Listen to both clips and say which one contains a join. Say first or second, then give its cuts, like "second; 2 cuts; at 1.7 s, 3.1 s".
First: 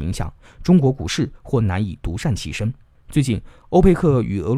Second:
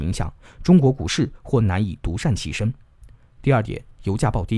first; 1 cut; at 2.9 s